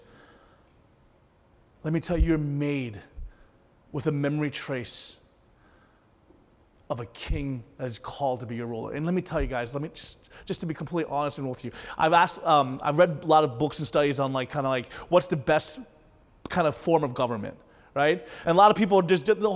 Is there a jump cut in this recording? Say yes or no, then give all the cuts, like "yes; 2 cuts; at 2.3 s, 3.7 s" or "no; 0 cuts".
no; 0 cuts